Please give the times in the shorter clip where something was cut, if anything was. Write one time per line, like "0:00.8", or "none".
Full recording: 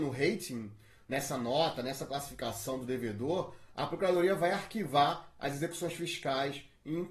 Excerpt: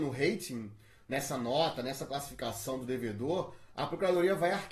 none